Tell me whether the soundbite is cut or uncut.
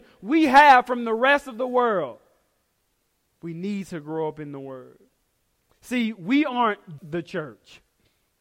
cut